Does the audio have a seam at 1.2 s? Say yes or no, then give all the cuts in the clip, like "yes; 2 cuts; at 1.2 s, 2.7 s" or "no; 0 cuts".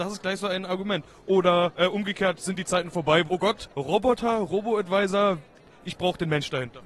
no; 1 cut; at 3.3 s